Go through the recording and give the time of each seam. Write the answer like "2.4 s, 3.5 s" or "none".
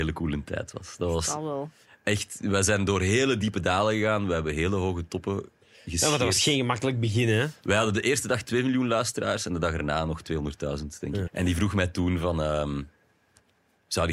11.3 s